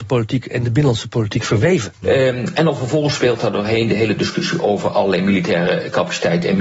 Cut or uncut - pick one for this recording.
cut